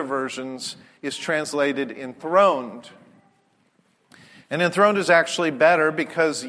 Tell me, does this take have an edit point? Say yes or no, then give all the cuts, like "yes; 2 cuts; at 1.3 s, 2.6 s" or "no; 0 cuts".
no; 0 cuts